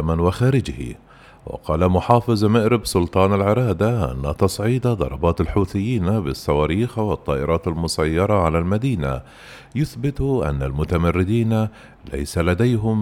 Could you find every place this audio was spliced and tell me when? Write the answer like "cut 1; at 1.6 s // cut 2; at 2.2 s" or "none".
none